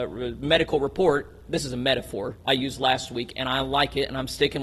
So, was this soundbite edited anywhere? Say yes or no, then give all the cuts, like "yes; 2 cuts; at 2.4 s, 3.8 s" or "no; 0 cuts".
no; 0 cuts